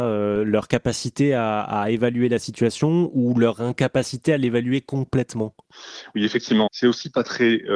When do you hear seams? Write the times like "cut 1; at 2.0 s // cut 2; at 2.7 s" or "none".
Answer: cut 1; at 6.7 s